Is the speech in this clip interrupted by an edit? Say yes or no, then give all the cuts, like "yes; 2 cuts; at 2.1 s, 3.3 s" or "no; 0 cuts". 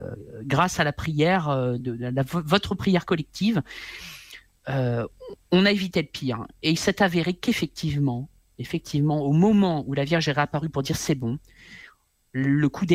no; 0 cuts